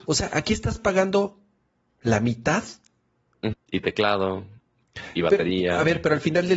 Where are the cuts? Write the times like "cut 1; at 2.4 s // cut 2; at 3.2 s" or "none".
cut 1; at 3.5 s